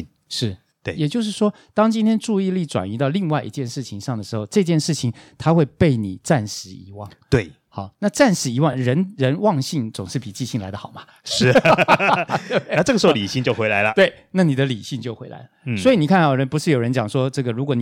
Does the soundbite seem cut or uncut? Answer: uncut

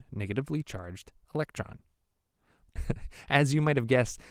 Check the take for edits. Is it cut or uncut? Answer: cut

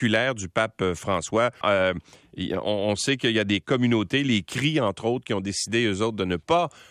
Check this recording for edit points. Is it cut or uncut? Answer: cut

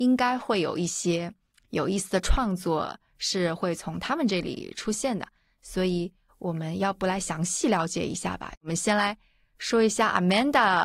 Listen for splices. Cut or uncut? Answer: uncut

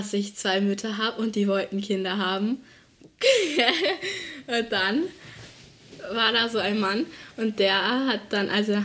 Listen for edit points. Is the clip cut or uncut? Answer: uncut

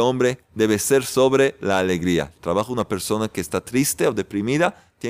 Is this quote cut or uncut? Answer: uncut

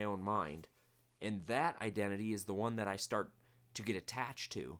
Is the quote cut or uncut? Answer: uncut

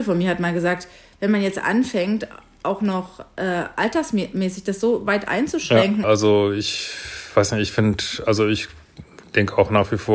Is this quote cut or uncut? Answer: cut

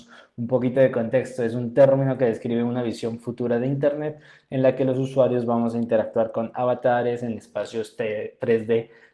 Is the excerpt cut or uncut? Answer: uncut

